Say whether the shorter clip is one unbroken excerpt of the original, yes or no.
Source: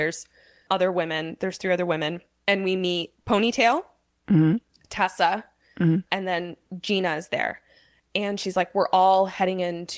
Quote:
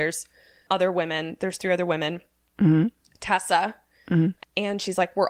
no